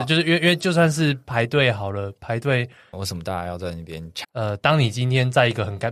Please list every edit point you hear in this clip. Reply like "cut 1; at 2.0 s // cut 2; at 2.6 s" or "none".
cut 1; at 2.9 s // cut 2; at 4.2 s